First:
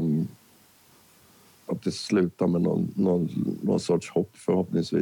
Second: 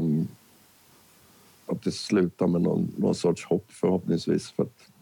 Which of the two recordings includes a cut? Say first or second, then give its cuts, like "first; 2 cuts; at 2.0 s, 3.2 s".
second; 1 cut; at 2.9 s